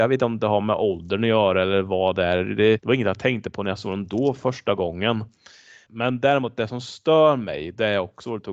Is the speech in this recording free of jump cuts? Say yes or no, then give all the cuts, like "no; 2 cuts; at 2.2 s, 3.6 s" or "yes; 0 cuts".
no; 2 cuts; at 2.8 s, 5.9 s